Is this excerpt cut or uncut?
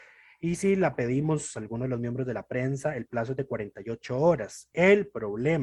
uncut